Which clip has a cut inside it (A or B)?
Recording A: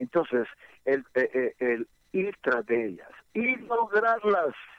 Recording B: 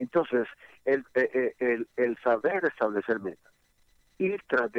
A